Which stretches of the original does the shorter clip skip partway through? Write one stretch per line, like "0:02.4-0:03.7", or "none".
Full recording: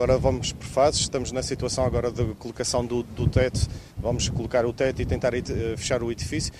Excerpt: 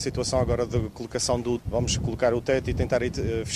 0:03.0-0:03.9

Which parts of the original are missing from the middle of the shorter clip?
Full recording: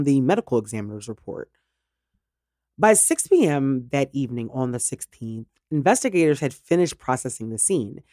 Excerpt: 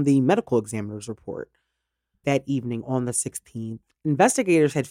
0:02.2-0:03.9

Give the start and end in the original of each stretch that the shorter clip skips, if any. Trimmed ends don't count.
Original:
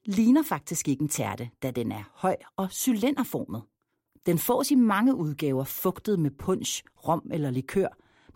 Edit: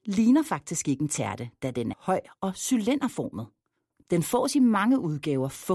0:01.9-0:02.1

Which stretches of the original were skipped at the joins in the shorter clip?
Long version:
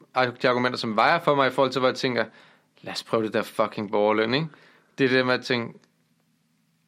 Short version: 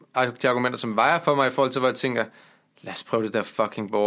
none

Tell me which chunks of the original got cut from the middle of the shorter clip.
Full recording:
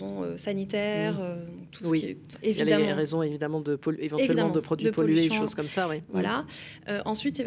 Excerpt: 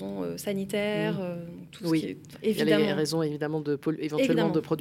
none

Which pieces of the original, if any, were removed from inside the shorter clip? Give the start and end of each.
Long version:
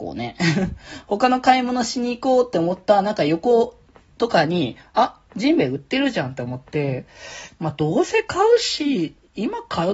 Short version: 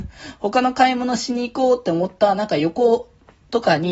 none

